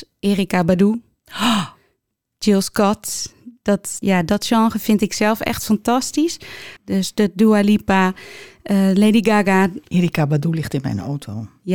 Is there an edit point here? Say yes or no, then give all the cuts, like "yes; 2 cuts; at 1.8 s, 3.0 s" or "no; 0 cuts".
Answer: yes; 3 cuts; at 4.0 s, 6.8 s, 9.8 s